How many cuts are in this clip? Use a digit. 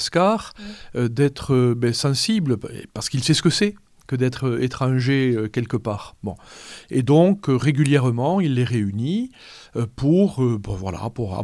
0